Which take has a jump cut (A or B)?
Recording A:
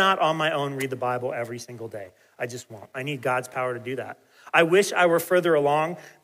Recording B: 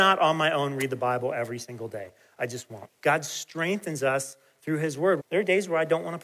B